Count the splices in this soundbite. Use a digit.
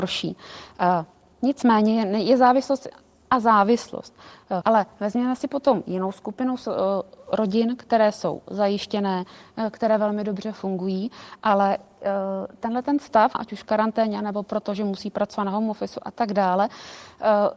2